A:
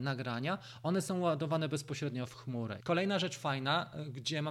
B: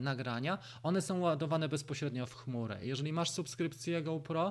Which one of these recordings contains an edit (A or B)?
A